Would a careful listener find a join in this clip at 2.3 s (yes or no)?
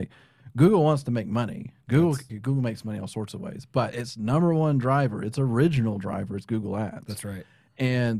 yes